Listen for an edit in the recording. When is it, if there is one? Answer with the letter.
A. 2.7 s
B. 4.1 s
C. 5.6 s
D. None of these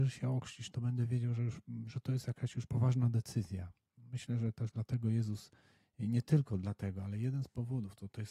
A